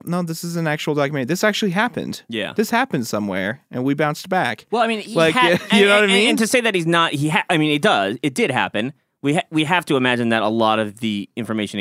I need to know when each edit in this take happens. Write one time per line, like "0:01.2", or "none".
none

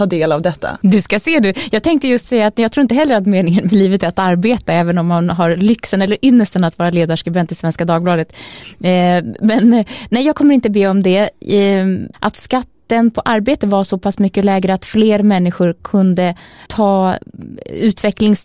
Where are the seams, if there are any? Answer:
0:12.1
0:16.7

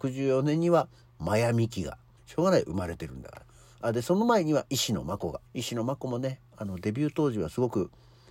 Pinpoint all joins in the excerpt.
0:02.2
0:05.5

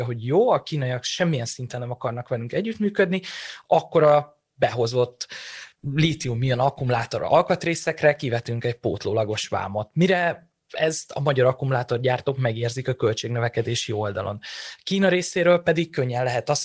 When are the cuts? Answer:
none

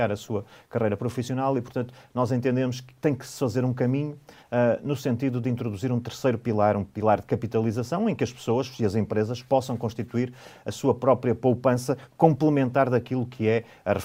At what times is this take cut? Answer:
none

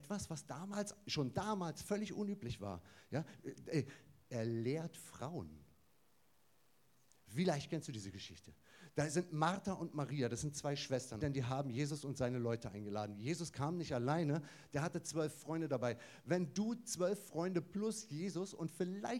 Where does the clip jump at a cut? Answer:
0:11.2

